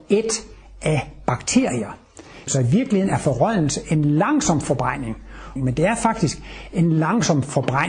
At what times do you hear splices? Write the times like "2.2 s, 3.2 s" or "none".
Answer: 2.5 s, 5.6 s